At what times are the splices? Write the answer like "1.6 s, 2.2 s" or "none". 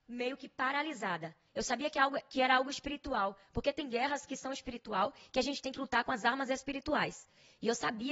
none